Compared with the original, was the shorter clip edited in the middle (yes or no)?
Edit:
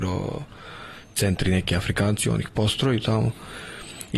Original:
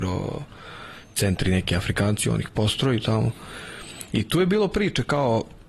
no